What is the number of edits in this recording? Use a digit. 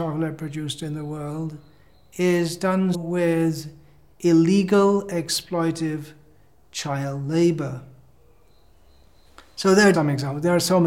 2